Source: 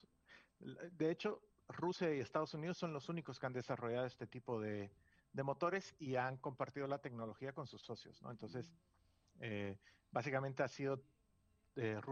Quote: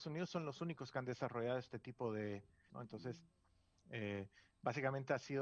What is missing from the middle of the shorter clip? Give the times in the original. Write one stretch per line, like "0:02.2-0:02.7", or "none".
0:05.2-0:08.2